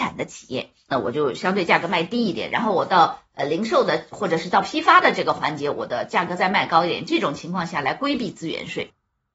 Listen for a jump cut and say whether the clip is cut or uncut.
cut